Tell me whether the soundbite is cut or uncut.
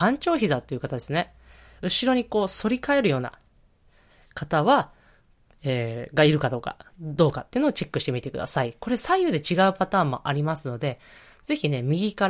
uncut